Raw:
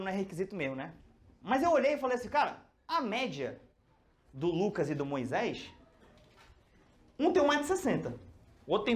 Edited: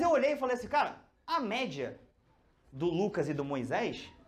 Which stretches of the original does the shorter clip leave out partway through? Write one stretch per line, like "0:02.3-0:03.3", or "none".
none